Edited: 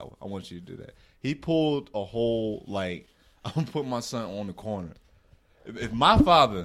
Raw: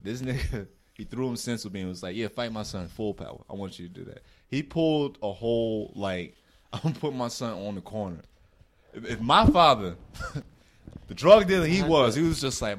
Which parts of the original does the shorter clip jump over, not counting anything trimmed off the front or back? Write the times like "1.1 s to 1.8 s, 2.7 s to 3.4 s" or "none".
none